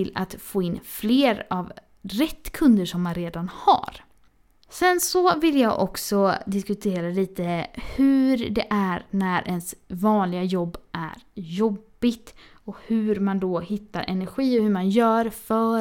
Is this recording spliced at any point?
no; 0 cuts

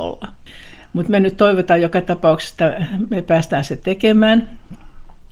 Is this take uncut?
yes; 0 cuts

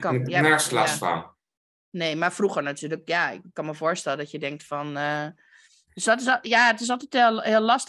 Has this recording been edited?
no; 0 cuts

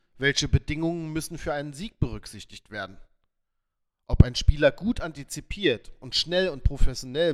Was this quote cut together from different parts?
no; 0 cuts

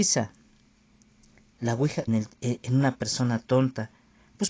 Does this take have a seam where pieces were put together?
yes; 1 cut; at 2.1 s

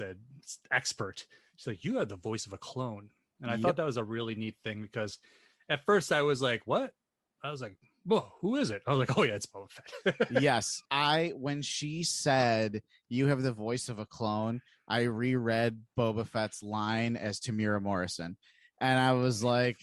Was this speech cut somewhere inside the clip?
yes; 1 cut; at 10.9 s

